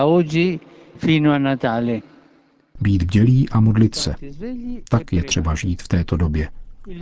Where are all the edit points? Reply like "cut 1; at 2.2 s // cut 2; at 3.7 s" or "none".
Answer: none